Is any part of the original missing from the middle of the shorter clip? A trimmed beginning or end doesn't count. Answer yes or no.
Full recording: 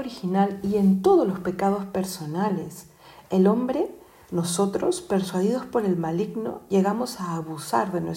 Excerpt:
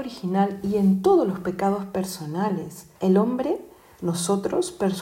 yes